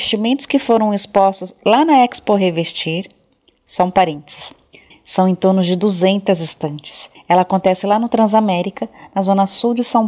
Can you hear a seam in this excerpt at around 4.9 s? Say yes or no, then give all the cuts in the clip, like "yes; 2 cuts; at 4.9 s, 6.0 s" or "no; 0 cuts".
yes; 2 cuts; at 4.9 s, 7.1 s